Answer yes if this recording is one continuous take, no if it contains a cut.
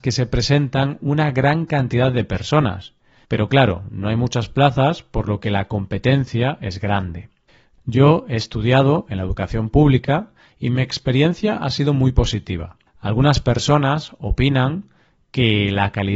no